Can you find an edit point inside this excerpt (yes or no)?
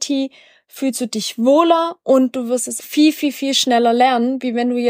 yes